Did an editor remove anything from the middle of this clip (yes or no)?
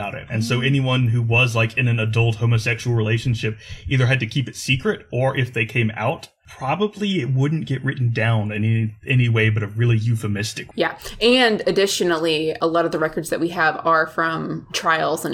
no